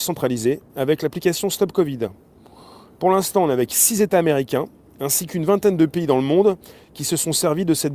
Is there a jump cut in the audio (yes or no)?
no